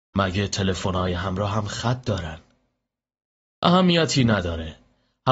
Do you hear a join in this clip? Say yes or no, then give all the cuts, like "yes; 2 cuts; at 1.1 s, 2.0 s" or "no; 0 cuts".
no; 0 cuts